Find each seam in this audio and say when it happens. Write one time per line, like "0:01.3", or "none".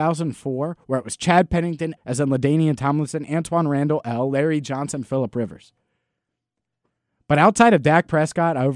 0:02.0

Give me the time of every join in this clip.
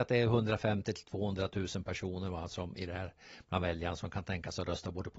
none

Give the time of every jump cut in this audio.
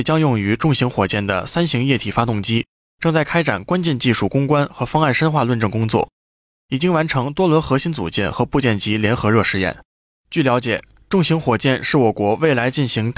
0:10.1

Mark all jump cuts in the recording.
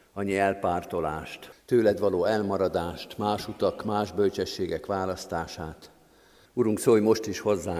0:01.5
0:06.5

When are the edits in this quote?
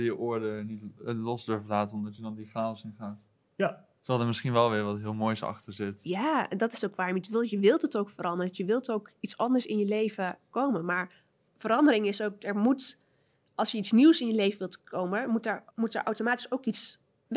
0:15.7

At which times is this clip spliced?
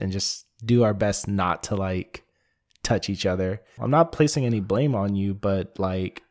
0:03.8

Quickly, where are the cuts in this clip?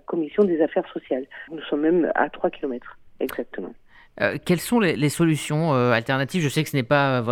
0:01.5

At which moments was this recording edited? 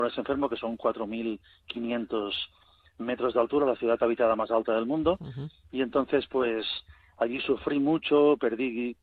none

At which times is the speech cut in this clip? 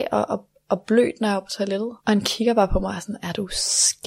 0:02.0

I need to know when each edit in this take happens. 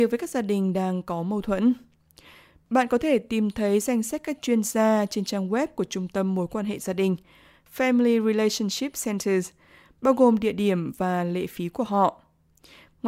none

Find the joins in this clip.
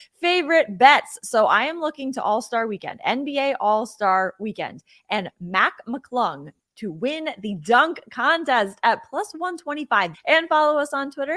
0:10.1

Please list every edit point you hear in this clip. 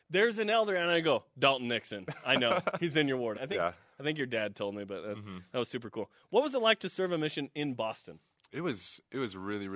0:03.3

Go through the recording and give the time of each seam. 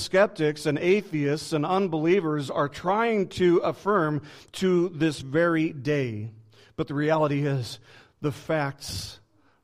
none

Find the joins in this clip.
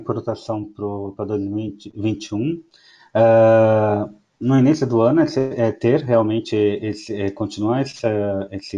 none

